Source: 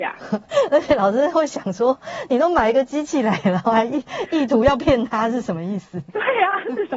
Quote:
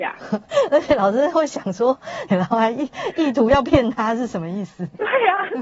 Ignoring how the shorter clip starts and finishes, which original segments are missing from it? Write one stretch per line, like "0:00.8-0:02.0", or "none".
0:02.3-0:03.4